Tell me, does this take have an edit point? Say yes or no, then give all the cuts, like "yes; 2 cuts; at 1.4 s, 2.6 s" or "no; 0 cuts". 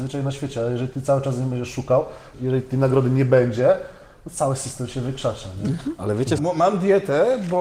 yes; 2 cuts; at 2.3 s, 6.4 s